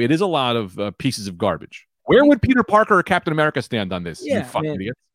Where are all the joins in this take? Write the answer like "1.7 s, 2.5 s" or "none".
2.0 s

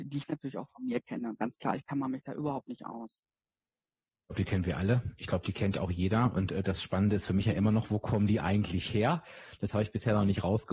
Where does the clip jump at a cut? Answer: none

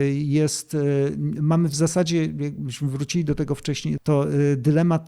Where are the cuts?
4.0 s

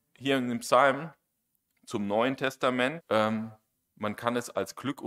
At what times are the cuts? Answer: 3.0 s

